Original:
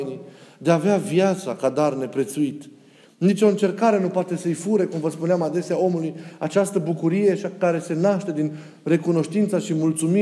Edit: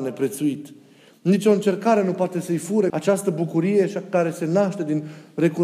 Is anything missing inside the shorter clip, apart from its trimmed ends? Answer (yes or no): yes